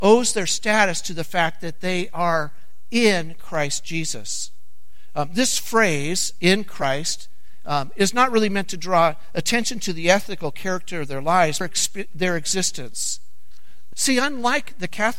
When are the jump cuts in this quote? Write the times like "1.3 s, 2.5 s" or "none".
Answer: 11.6 s, 13.9 s